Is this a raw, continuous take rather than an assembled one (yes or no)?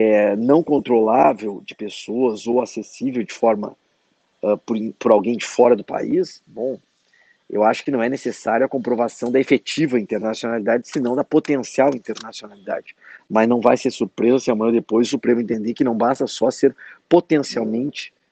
yes